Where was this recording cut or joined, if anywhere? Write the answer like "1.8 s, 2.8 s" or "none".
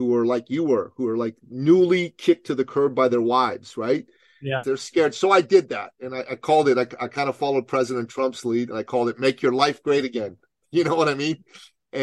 4.6 s